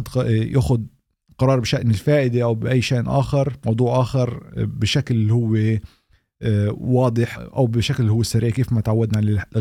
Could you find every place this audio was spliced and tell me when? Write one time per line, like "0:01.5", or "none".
0:07.3